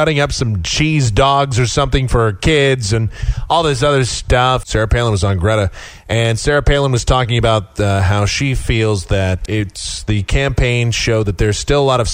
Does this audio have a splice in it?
yes; 2 cuts; at 4.6 s, 9.5 s

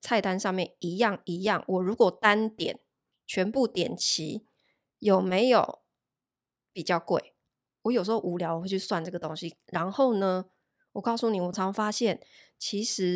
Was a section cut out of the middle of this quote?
yes; 1 cut; at 11.5 s

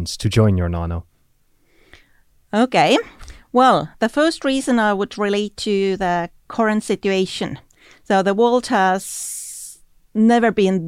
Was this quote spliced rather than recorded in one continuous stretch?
no; 0 cuts

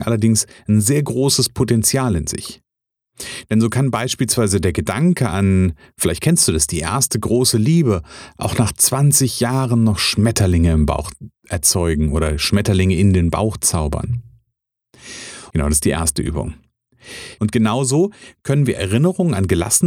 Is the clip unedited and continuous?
no; 3 cuts; at 11.4 s, 15.5 s, 17.4 s

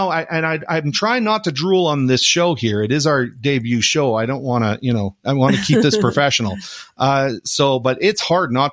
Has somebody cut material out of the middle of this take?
no; 0 cuts

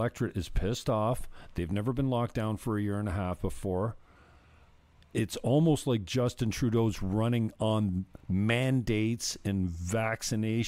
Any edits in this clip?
no; 0 cuts

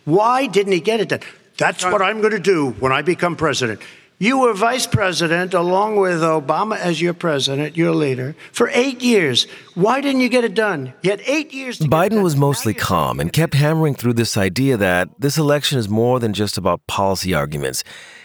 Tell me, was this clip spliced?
no; 0 cuts

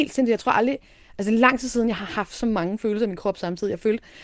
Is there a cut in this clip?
no; 0 cuts

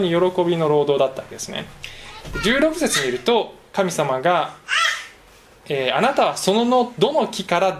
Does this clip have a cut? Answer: no; 0 cuts

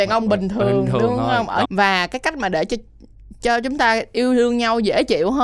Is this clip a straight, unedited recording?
no; 1 cut; at 1.6 s

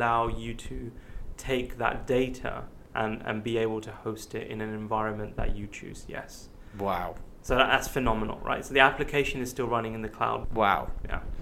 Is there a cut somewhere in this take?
yes; 1 cut; at 10.4 s

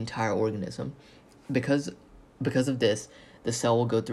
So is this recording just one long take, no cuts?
yes; 0 cuts

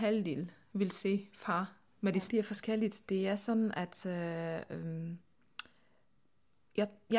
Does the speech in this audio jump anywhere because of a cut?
yes; 1 cut; at 2.3 s

